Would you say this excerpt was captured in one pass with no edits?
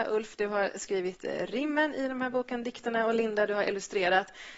yes; 0 cuts

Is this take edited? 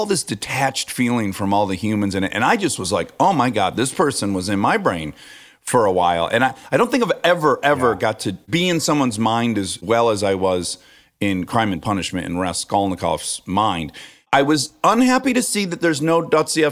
no; 0 cuts

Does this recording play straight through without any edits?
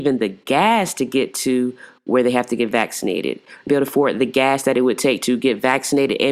no; 1 cut; at 3.7 s

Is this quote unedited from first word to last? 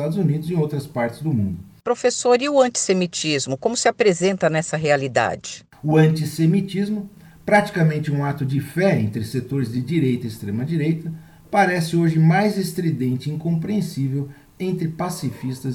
yes; 0 cuts

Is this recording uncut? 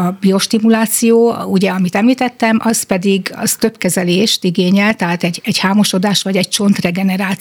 yes; 0 cuts

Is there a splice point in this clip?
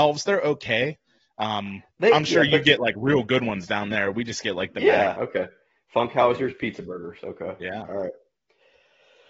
yes; 2 cuts; at 1.9 s, 5.1 s

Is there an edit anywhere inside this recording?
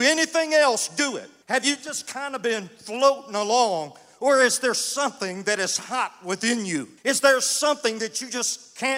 yes; 2 cuts; at 1.4 s, 7.0 s

